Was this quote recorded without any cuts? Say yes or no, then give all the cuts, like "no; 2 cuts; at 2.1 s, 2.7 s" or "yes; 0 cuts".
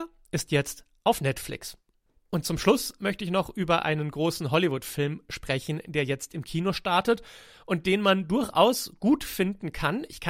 yes; 0 cuts